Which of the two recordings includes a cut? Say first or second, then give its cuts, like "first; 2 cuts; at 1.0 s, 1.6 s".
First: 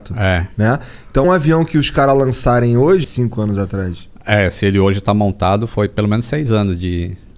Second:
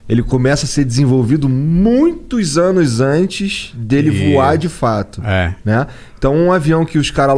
first; 2 cuts; at 1.2 s, 3.0 s